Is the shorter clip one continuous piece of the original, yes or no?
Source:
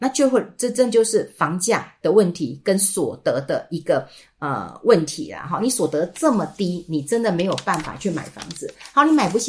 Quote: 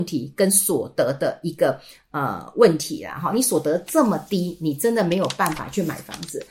yes